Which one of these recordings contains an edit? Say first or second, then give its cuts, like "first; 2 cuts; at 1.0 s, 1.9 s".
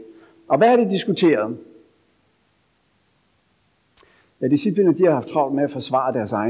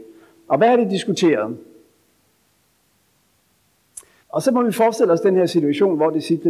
second; 1 cut; at 4.2 s